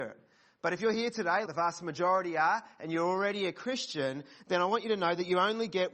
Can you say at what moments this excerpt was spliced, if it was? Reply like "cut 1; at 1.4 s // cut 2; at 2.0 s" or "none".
cut 1; at 1.5 s